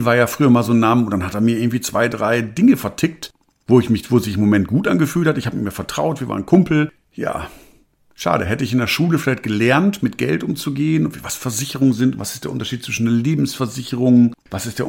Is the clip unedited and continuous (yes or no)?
yes